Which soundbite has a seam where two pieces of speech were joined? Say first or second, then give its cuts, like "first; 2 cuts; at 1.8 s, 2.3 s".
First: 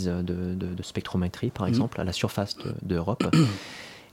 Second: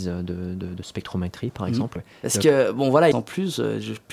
second; 2 cuts; at 2.0 s, 3.1 s